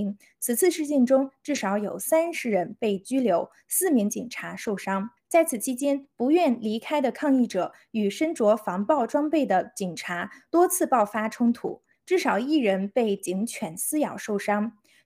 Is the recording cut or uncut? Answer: cut